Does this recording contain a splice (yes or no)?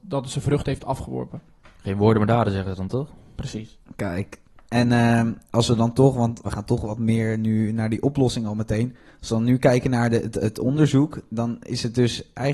yes